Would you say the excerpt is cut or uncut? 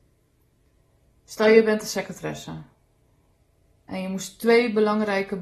uncut